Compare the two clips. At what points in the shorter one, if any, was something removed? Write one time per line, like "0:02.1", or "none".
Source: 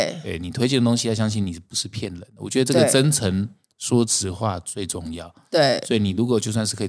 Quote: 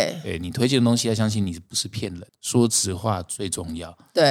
0:02.3